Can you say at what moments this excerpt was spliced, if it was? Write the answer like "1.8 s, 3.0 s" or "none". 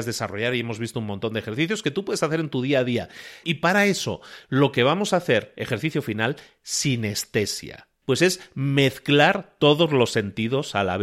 3.4 s, 8.0 s

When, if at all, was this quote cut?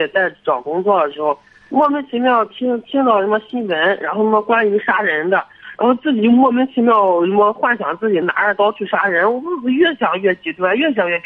8.2 s

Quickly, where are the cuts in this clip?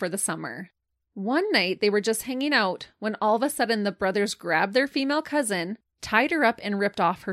none

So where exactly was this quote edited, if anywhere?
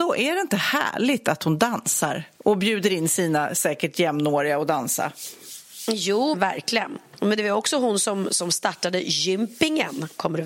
6.3 s

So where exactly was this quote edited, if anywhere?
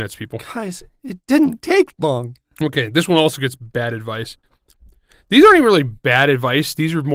none

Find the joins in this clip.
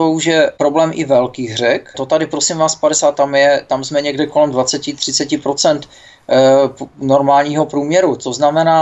1.9 s, 3.1 s

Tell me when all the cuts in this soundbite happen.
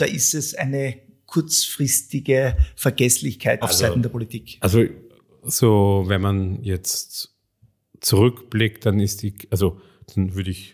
3.6 s

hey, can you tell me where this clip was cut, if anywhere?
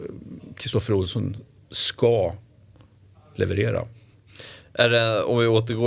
none

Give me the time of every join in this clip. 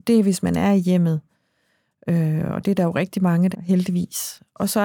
3.5 s

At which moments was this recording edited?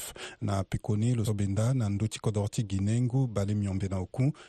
1.3 s

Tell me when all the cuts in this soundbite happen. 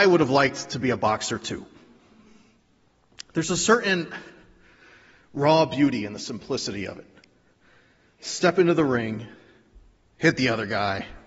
none

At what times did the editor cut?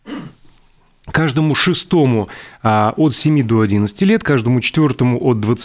none

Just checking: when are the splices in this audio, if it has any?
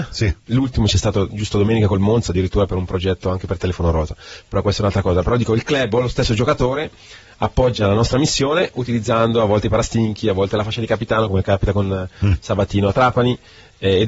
none

